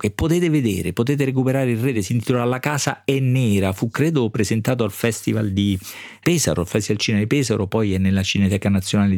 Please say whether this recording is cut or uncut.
uncut